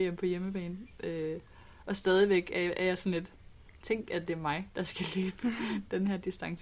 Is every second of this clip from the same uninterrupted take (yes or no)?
yes